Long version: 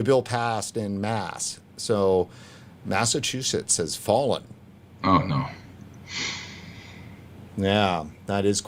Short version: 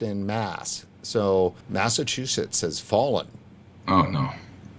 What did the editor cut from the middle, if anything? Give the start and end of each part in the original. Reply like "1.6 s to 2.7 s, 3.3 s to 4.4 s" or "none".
2.3 s to 2.8 s